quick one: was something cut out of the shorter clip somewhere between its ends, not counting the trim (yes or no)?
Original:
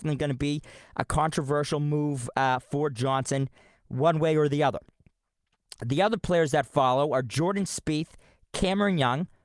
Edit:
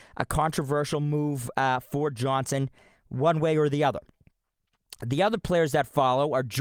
no